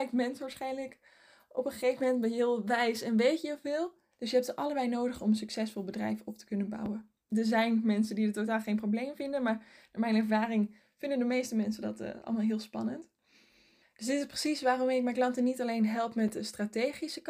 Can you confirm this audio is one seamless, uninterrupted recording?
no; 3 cuts; at 4.1 s, 7.3 s, 13.8 s

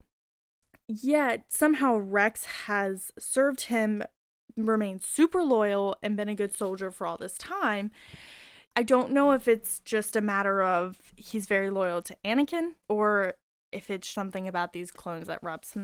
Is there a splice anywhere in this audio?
yes; 3 cuts; at 8.7 s, 12.8 s, 14.1 s

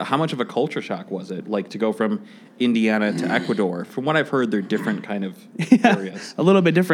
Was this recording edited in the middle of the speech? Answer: no; 0 cuts

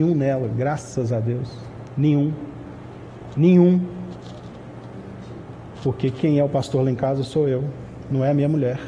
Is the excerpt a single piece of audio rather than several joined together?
yes; 0 cuts

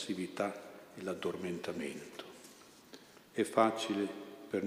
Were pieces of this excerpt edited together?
yes; 1 cut; at 3.2 s

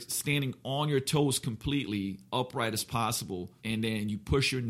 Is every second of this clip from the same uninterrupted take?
no; 1 cut; at 3.6 s

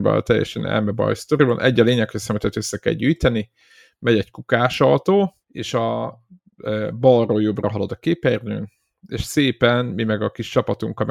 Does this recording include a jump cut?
yes; 1 cut; at 5.4 s

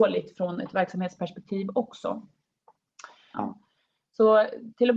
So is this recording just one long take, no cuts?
no; 1 cut; at 3.3 s

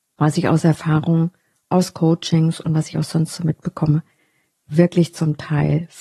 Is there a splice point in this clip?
no; 0 cuts

